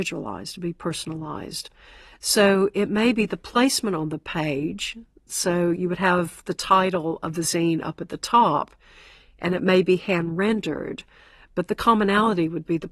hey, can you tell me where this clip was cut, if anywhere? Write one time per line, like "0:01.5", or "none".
none